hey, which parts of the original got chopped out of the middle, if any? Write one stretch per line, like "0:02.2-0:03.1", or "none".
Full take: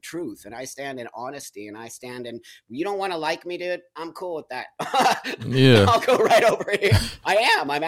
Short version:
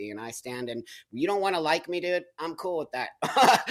none

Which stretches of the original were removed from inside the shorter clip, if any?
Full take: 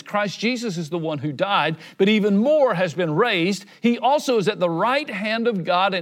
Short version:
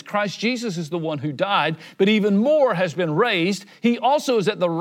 none

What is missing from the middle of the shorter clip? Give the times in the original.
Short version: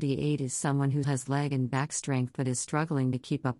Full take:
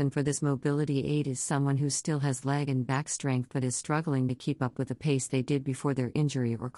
0:01.9-0:02.2

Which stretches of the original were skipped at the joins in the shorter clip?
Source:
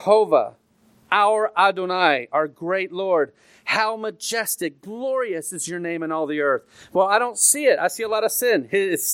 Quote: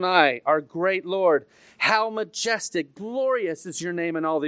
none

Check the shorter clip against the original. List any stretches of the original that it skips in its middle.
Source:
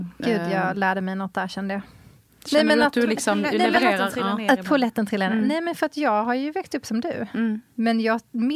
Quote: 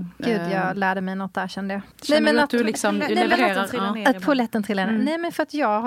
0:01.9-0:02.3

